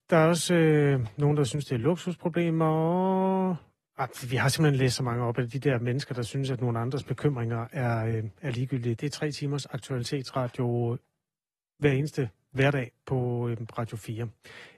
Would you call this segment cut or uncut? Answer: cut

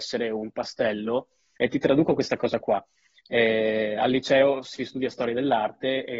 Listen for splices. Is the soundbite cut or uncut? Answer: cut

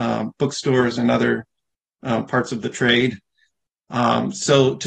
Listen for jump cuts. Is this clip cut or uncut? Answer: uncut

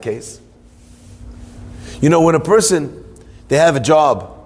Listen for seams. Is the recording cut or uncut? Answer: uncut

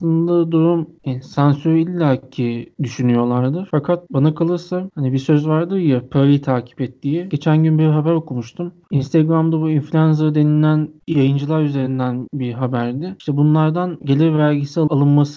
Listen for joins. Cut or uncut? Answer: cut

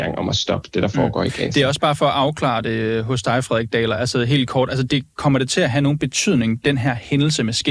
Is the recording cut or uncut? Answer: uncut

